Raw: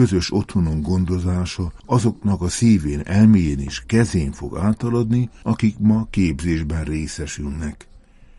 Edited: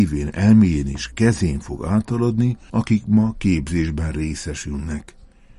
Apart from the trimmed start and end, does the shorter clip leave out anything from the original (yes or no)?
no